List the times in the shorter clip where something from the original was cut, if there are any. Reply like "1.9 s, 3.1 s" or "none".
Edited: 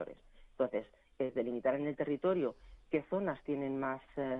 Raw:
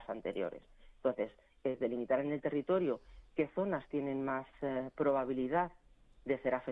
none